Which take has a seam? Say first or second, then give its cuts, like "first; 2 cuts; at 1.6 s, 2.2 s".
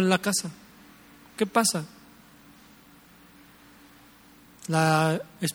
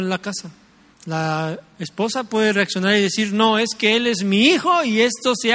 second; 1 cut; at 0.9 s